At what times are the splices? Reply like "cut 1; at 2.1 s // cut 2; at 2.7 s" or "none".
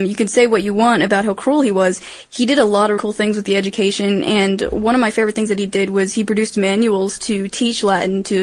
cut 1; at 3.0 s

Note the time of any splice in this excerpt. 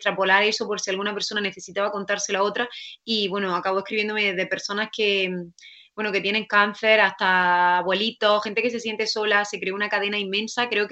none

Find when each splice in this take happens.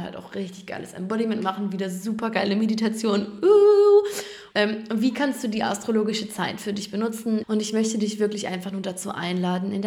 cut 1; at 4.5 s // cut 2; at 7.4 s

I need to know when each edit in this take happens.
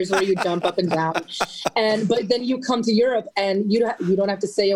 none

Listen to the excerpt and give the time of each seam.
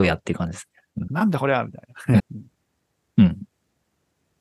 cut 1; at 1.1 s // cut 2; at 2.2 s

